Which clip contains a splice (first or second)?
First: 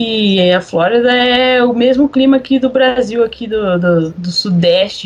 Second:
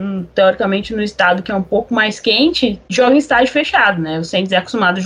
first